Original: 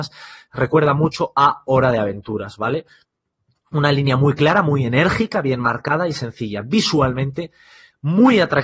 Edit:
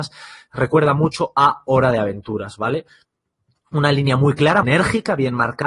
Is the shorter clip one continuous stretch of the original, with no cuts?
no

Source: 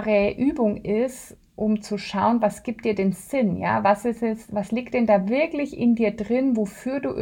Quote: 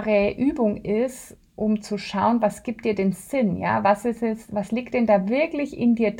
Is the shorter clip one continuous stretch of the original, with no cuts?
yes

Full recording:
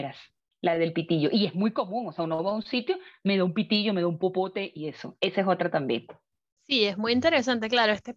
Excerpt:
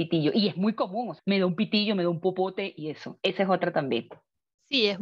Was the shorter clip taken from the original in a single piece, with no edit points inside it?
no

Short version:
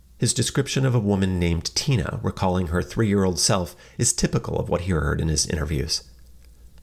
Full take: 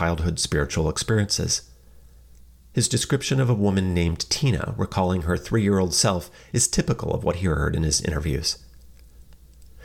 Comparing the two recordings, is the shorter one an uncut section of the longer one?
yes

